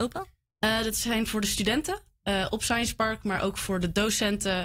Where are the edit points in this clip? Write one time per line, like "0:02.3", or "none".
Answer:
none